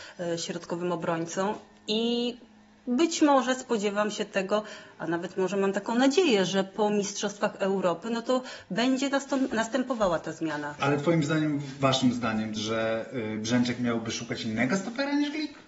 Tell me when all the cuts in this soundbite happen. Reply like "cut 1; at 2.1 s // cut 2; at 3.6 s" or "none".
cut 1; at 10.8 s // cut 2; at 12.6 s